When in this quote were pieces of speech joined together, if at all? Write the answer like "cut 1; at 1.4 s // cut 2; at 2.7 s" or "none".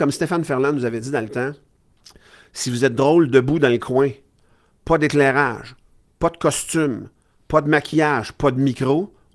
none